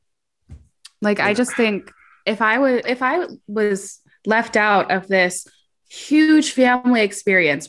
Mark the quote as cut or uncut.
cut